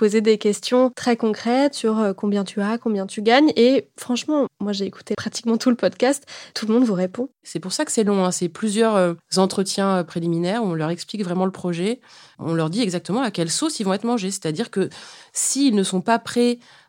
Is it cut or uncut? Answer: cut